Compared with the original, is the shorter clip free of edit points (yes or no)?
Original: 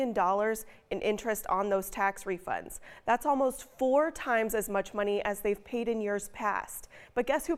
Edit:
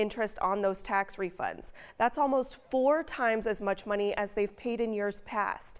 yes